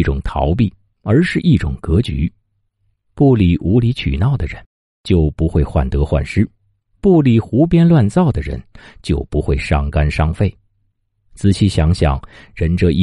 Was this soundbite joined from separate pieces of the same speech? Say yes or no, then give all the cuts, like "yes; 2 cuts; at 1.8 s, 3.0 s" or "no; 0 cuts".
no; 0 cuts